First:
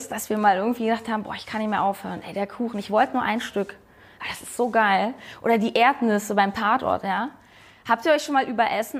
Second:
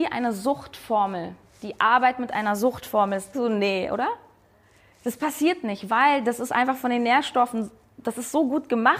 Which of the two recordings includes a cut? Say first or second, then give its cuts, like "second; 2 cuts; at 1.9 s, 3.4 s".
second; 1 cut; at 3.3 s